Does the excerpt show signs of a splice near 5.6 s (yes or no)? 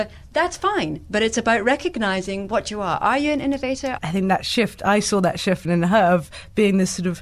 yes